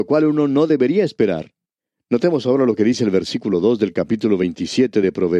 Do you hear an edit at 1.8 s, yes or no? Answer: no